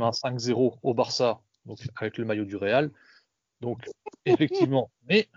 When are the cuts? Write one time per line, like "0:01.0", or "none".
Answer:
none